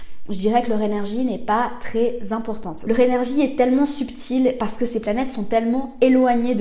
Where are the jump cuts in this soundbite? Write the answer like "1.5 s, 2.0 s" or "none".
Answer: 2.9 s

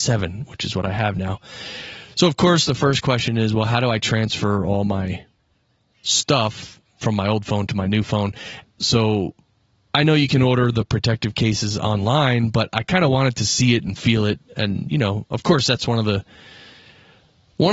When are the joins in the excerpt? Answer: 8.6 s

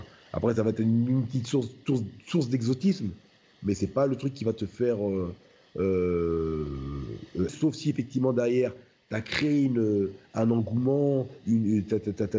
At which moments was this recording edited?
7.5 s

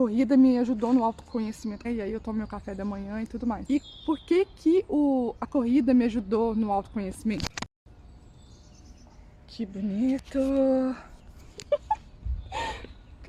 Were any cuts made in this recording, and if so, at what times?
1.8 s

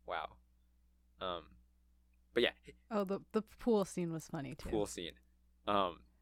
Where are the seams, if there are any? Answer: none

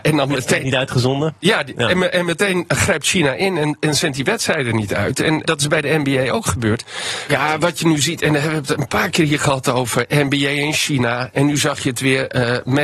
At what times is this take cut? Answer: 5.4 s, 7.3 s

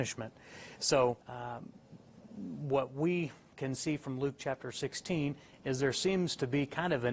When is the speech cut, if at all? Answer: 1.2 s

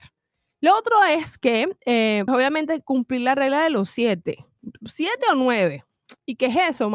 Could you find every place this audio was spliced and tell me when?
2.3 s

